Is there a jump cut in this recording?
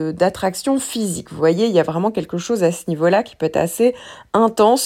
no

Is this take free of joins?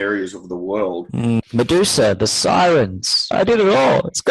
no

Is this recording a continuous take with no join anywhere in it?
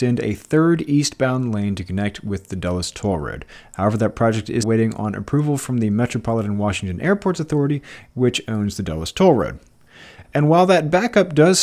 no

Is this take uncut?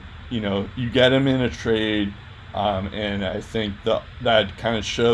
yes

